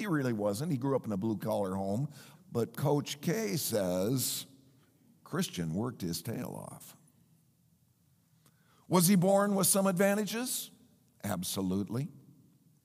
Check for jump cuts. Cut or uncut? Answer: cut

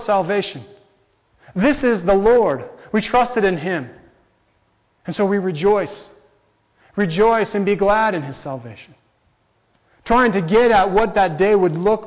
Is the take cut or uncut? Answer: uncut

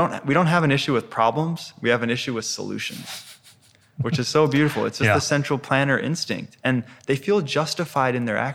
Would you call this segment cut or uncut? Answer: uncut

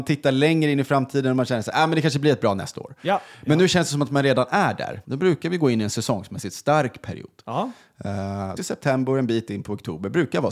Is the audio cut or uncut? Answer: cut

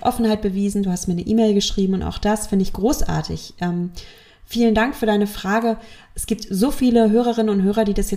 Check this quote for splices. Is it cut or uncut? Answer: uncut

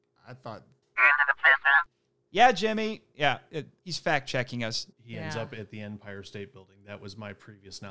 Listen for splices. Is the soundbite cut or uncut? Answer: cut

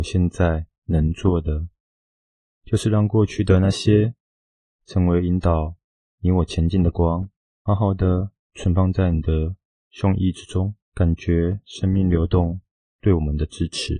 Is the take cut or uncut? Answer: cut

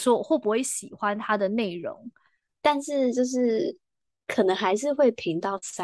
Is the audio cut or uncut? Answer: cut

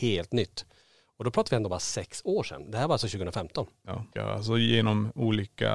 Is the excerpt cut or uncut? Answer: cut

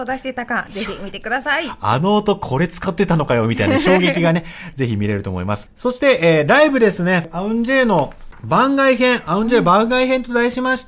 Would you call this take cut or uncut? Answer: cut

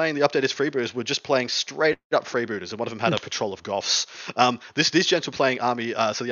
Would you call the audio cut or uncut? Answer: uncut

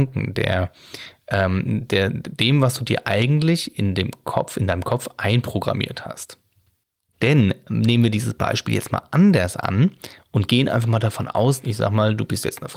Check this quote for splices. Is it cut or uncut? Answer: cut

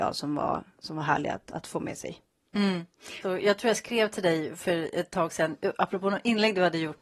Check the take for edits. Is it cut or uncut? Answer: cut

